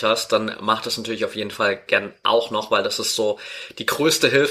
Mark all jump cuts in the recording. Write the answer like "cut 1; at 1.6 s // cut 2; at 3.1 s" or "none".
none